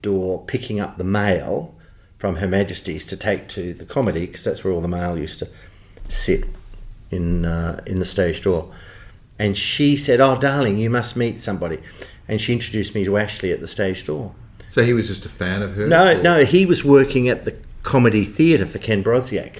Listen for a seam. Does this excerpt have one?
yes; 1 cut; at 9.4 s

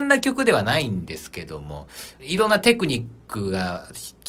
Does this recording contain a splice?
yes; 1 cut; at 2.2 s

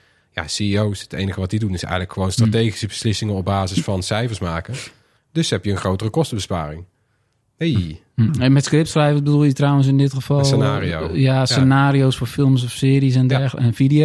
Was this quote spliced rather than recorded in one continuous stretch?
yes; 1 cut; at 5.2 s

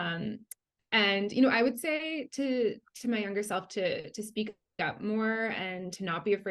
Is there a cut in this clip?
no; 0 cuts

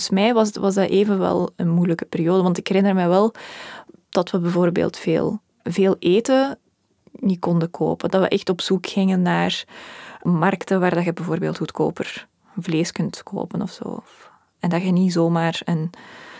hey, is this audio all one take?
no; 1 cut; at 5.5 s

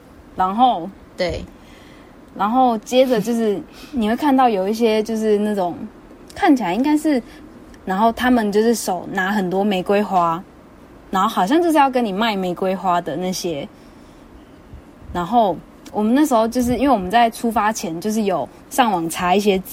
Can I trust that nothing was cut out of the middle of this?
no; 1 cut; at 7.8 s

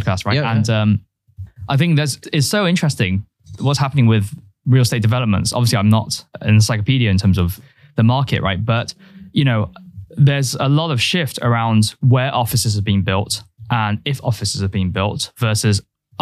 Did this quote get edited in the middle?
no; 0 cuts

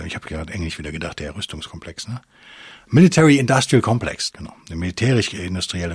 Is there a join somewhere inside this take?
yes; 1 cut; at 4.3 s

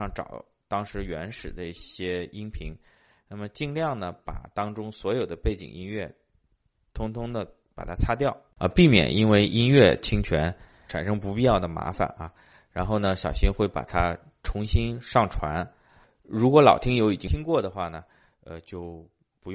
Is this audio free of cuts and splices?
yes; 0 cuts

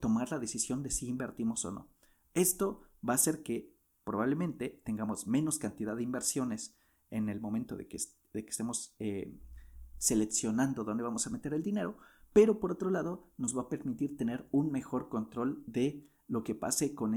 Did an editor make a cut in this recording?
no; 0 cuts

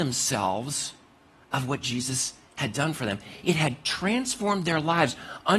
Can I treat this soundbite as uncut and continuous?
yes; 0 cuts

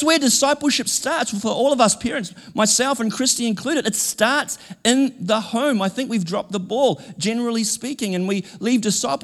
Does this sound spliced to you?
no; 0 cuts

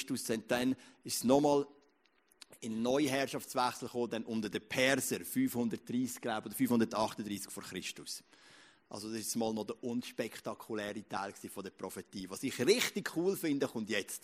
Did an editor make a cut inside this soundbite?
no; 0 cuts

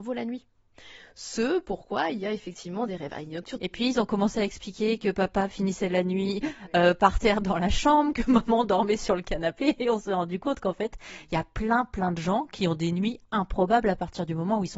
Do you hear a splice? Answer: yes; 1 cut; at 3.6 s

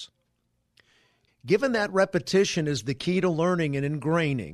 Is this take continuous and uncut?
yes; 0 cuts

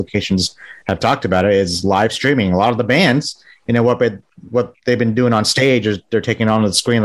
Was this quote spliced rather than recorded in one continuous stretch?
no; 0 cuts

